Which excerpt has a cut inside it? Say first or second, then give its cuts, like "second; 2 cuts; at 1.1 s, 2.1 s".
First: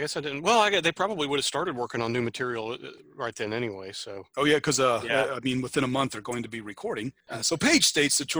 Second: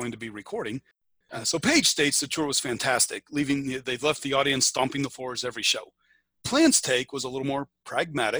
first; 1 cut; at 7.2 s